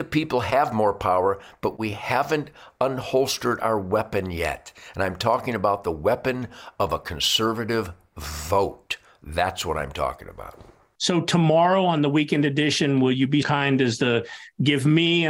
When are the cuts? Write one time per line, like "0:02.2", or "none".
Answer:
0:10.9
0:13.4